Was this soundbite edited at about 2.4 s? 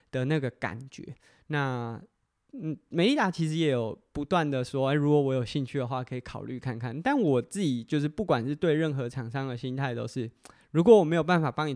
no; 0 cuts

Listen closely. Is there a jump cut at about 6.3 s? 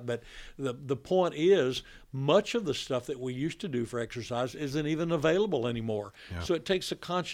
no; 0 cuts

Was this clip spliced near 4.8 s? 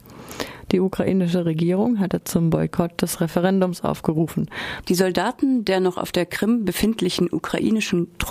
yes; 1 cut; at 4.8 s

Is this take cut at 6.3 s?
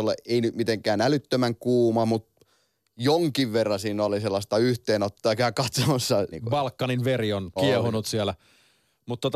yes; 2 cuts; at 6.3 s, 7.6 s

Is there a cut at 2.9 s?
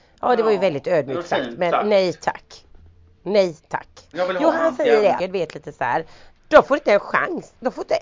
no; 3 cuts; at 4.1 s, 5.2 s, 6.4 s

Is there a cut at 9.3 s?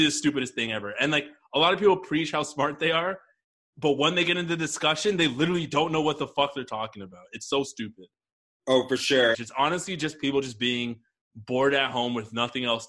yes; 1 cut; at 9.3 s

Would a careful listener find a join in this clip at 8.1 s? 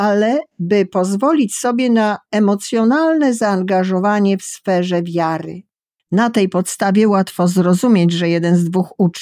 no; 1 cut; at 6.0 s

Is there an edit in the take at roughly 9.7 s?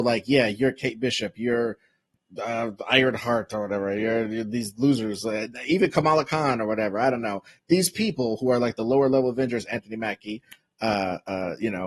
yes; 1 cut; at 9.7 s

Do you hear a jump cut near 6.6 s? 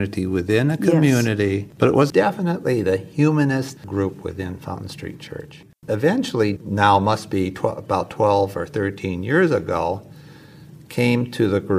yes; 1 cut; at 6.6 s

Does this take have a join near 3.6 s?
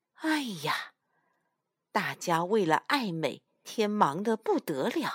yes; 1 cut; at 3.6 s

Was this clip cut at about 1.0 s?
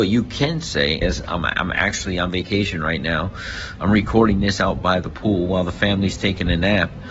yes; 1 cut; at 1.0 s

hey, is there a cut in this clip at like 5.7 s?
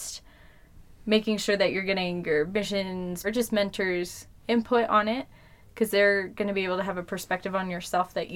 no; 1 cut; at 3.2 s

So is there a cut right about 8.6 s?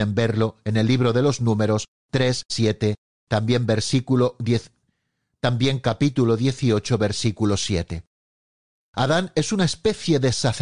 no; 1 cut; at 2.5 s

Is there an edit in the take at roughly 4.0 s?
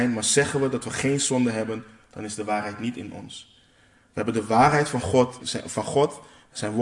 no; 1 cut; at 5.4 s

